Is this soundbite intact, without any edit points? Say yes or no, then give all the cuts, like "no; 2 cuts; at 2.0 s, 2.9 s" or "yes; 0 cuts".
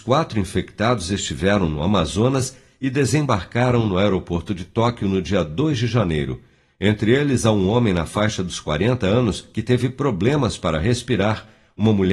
yes; 0 cuts